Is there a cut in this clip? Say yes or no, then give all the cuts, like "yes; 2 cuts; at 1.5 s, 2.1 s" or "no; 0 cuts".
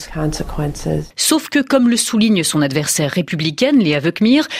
no; 0 cuts